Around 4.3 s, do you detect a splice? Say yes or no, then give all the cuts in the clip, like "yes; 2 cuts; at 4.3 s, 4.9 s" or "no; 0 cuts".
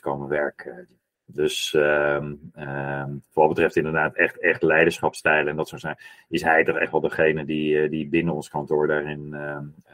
no; 0 cuts